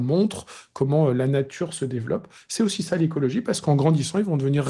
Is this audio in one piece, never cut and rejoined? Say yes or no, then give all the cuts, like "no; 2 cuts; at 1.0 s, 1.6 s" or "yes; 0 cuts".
yes; 0 cuts